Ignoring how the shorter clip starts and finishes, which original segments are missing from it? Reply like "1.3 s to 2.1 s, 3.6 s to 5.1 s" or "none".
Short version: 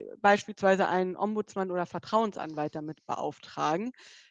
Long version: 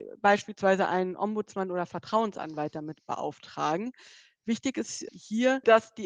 none